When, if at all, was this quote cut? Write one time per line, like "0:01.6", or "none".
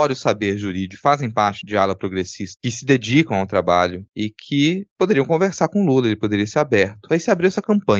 none